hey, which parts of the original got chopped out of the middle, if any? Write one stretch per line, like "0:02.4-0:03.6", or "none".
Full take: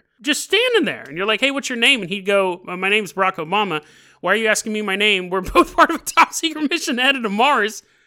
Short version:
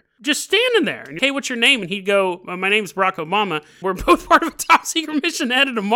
0:01.2-0:01.4
0:04.0-0:05.3